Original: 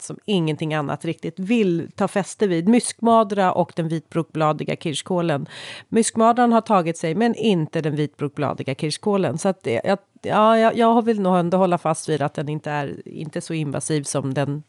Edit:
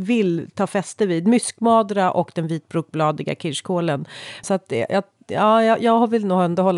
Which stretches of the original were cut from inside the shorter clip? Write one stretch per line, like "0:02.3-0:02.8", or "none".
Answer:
0:05.8-0:09.4